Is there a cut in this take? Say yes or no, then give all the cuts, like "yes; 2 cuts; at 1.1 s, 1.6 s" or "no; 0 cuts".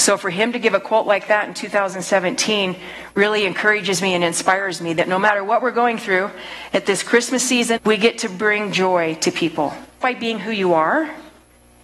yes; 2 cuts; at 7.8 s, 10.0 s